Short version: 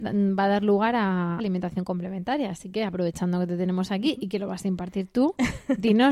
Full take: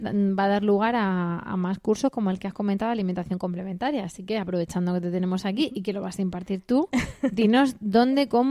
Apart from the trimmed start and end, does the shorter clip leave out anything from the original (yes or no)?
yes